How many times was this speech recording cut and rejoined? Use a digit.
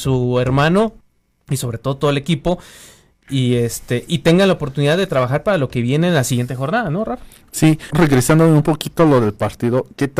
1